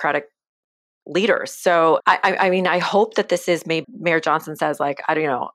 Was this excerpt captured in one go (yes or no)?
no